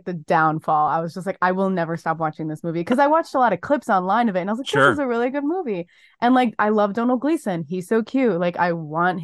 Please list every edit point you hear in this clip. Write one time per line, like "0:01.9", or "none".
none